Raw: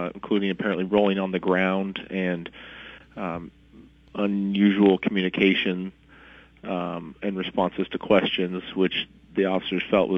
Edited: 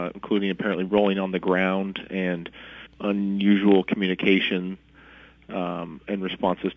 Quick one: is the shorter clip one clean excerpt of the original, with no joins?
no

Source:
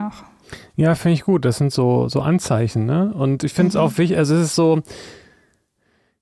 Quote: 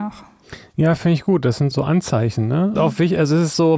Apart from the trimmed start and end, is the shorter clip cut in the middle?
yes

